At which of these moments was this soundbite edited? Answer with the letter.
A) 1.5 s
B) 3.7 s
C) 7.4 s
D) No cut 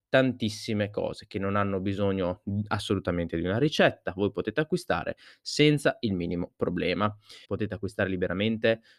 C